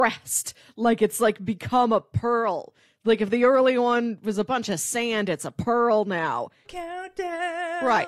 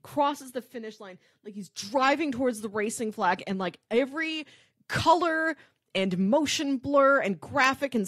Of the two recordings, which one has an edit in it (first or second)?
first